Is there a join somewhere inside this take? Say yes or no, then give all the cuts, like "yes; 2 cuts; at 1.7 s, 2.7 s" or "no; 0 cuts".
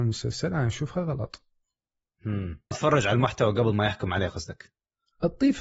yes; 1 cut; at 2.7 s